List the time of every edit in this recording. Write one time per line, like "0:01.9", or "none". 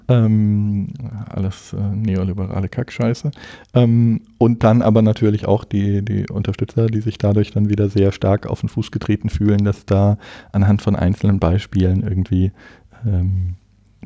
none